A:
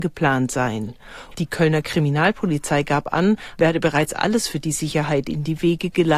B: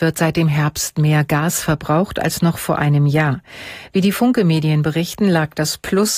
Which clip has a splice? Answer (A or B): A